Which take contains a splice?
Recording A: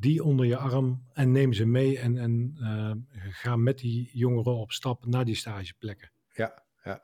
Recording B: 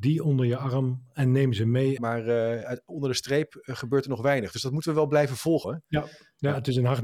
B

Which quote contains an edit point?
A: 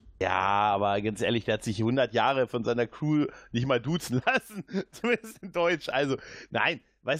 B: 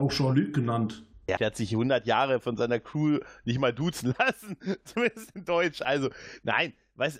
B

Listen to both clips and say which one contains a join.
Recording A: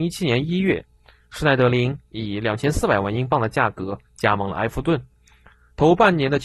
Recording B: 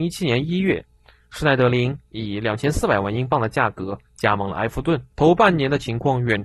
B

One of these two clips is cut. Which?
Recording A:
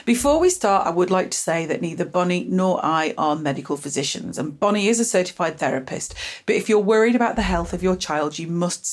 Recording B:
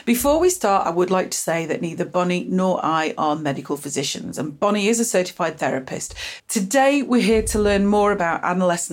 B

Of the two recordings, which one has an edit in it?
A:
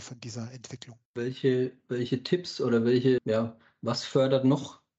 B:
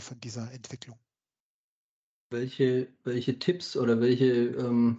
A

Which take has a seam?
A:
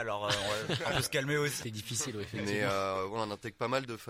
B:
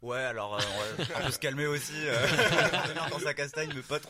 A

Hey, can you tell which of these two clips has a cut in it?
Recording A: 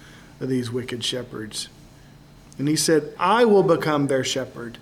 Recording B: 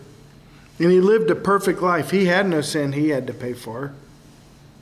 A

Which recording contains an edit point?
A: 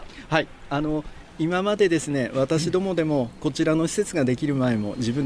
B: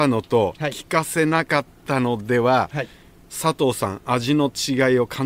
A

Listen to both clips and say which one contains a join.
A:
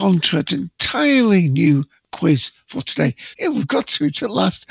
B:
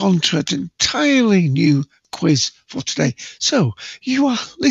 A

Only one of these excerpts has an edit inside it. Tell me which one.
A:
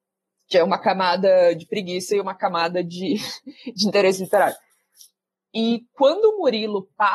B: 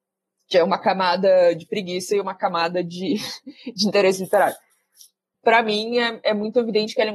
B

